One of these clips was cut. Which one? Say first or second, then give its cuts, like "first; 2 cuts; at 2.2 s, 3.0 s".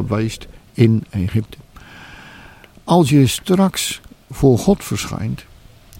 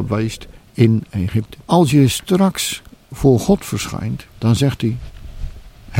second; 2 cuts; at 1.6 s, 4.3 s